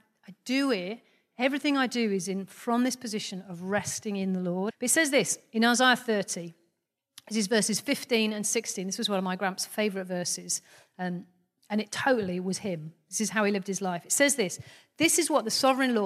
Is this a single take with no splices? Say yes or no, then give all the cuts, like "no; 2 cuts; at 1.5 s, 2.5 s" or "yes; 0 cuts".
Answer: no; 1 cut; at 4.7 s